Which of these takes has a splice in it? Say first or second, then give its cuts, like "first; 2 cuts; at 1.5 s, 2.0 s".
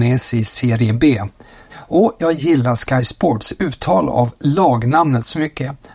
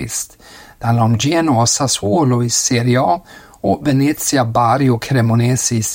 first; 1 cut; at 1.7 s